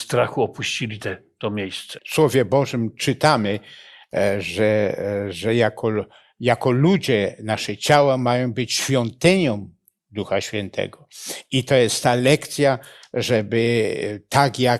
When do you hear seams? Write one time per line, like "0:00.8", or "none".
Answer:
0:02.0